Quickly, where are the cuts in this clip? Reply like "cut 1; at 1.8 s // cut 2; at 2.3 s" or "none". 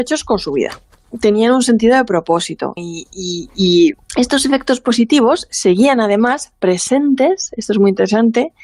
cut 1; at 2.8 s // cut 2; at 4.0 s